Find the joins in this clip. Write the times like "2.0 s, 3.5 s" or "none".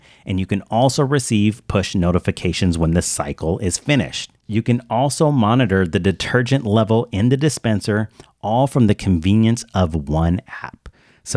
none